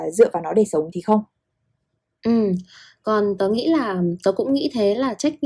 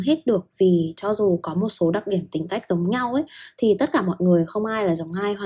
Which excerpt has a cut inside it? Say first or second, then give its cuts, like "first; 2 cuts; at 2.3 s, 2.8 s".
first; 1 cut; at 0.9 s